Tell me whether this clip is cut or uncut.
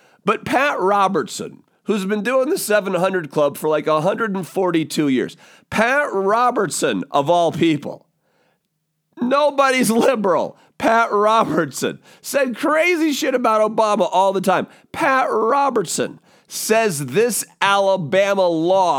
uncut